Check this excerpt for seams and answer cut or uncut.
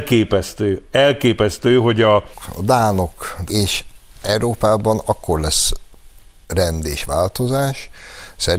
cut